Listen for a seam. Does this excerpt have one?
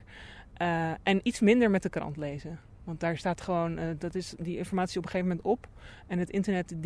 no; 0 cuts

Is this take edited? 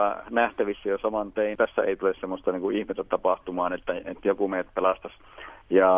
yes; 1 cut; at 1.6 s

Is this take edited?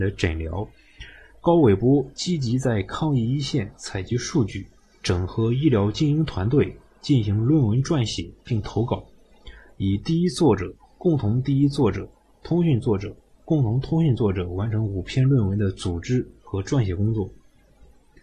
no; 0 cuts

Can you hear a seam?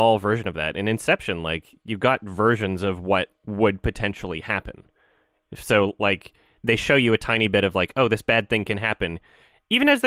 yes; 1 cut; at 3.4 s

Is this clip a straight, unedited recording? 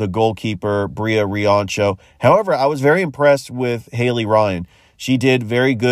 yes; 0 cuts

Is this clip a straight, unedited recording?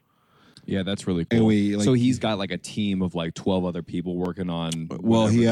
yes; 0 cuts

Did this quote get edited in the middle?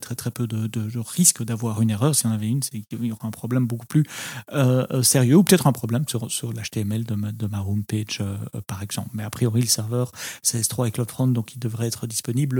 no; 0 cuts

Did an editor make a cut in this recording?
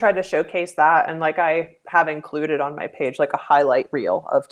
no; 0 cuts

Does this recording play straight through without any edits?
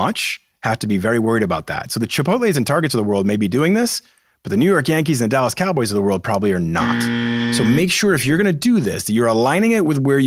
yes; 0 cuts

